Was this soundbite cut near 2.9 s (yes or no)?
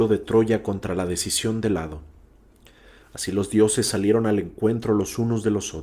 no